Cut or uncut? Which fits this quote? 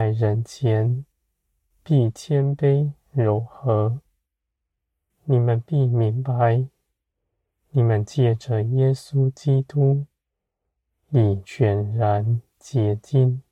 cut